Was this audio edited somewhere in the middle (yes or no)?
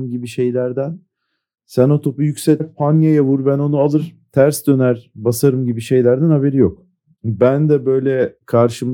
yes